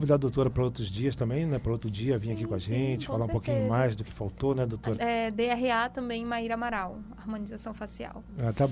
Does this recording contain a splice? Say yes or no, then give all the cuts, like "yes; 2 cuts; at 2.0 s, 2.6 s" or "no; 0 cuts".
yes; 1 cut; at 4.9 s